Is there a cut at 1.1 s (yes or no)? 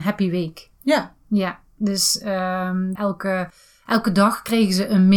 no